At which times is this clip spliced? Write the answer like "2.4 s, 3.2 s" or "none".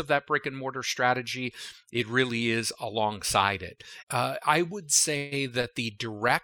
4.0 s